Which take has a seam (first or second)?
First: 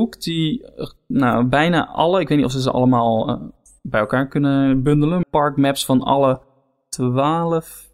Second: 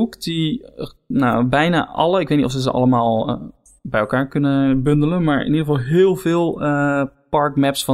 first